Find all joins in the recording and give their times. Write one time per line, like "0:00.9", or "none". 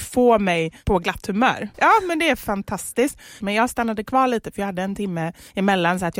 0:01.7
0:03.4